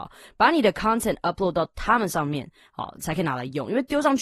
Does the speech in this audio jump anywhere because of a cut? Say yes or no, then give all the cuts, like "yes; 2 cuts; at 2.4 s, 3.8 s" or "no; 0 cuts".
yes; 1 cut; at 3.0 s